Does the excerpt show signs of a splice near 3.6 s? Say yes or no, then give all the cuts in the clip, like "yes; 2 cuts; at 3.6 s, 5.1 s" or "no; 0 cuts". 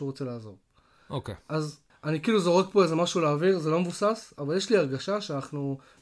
no; 1 cut; at 1.9 s